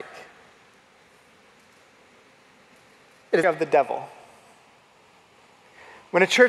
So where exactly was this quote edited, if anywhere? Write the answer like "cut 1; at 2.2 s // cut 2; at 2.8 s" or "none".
cut 1; at 3.4 s